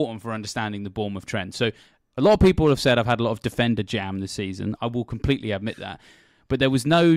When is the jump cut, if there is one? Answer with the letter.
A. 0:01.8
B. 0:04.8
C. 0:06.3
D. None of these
B